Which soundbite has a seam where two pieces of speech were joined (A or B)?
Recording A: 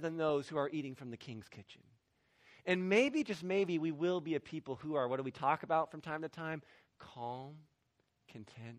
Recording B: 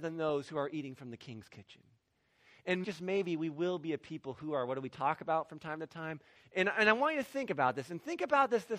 B